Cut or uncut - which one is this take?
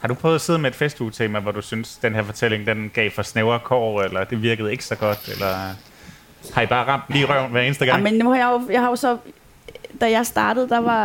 cut